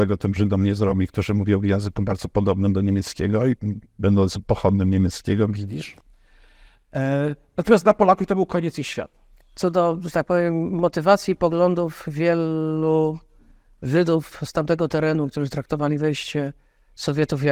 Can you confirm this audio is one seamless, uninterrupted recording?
yes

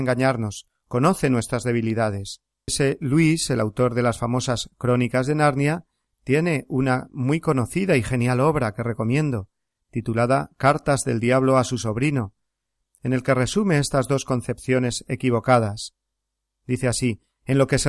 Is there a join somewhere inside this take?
yes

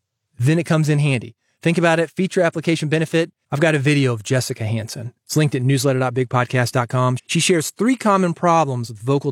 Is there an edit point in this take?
yes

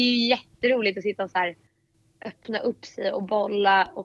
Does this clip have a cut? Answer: no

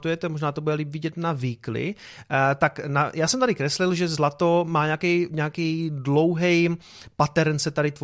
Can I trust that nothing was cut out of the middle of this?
yes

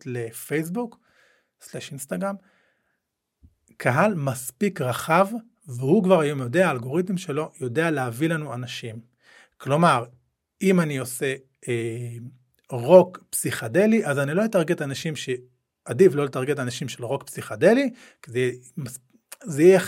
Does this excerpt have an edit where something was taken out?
no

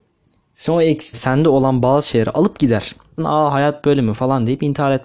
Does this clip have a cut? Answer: yes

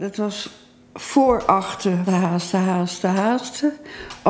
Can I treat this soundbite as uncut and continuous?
no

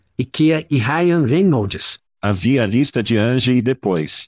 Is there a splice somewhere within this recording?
yes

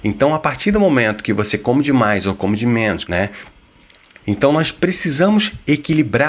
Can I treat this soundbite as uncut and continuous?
no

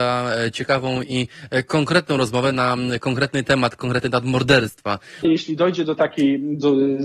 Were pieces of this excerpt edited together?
yes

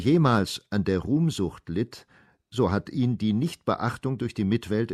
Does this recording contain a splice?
no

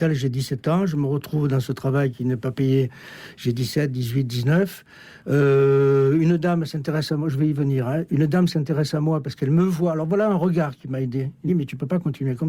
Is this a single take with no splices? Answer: no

